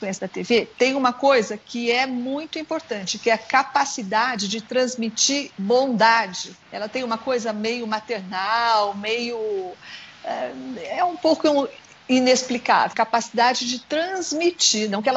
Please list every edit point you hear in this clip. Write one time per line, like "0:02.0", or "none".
0:06.6
0:12.9